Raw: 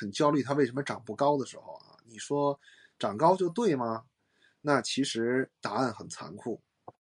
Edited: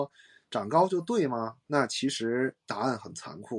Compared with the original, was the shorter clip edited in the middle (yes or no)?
yes